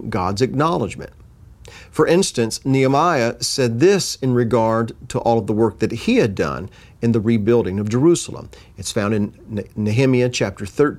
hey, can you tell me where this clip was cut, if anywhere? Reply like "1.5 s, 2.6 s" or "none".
none